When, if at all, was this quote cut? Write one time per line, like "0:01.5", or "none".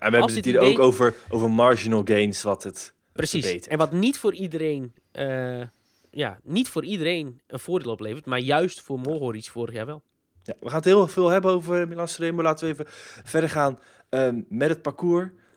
0:03.2